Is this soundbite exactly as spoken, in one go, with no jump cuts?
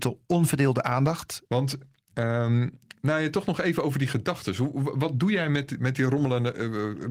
no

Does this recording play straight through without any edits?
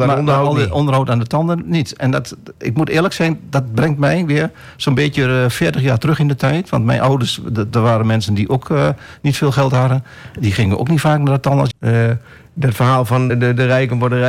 no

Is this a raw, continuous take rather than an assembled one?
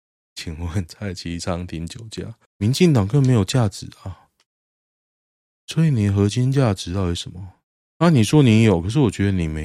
no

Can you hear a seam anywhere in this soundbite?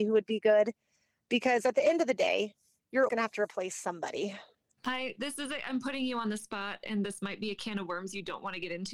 yes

